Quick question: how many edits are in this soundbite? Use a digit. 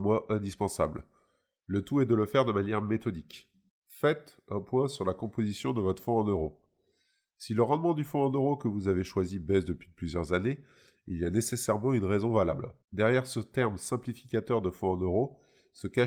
2